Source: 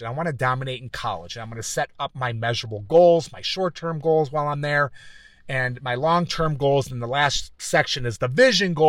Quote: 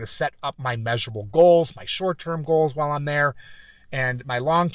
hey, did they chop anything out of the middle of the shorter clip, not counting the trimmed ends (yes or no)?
no